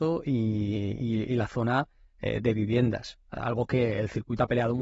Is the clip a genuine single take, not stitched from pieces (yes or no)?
yes